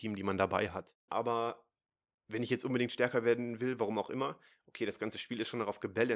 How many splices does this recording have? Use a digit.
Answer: 1